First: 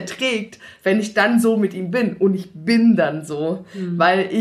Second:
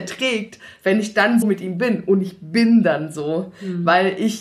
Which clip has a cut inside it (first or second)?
second